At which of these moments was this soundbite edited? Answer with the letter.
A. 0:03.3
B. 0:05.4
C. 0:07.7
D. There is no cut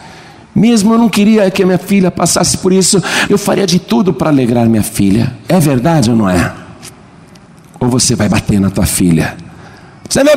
A